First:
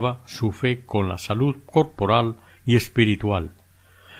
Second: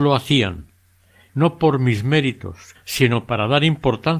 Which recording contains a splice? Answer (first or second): second